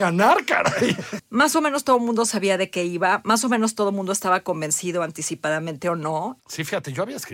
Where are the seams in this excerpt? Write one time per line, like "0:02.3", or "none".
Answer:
0:01.2
0:06.4